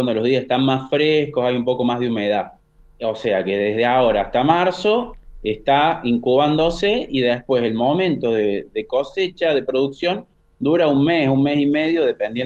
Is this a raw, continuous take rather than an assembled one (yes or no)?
yes